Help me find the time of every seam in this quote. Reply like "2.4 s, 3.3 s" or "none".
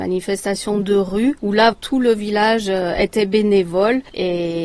1.7 s